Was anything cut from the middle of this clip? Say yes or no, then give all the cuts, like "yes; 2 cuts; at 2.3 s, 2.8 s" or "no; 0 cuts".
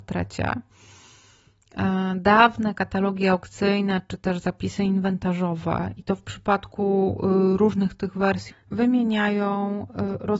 yes; 1 cut; at 8.5 s